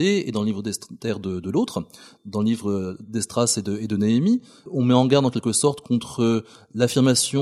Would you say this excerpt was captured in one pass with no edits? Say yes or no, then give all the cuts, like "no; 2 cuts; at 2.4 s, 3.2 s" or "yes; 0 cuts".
yes; 0 cuts